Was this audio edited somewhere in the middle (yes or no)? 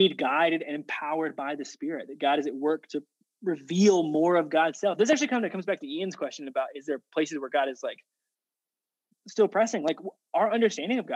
no